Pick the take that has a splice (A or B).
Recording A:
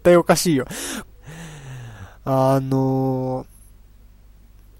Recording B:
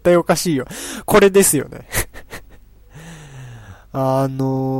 A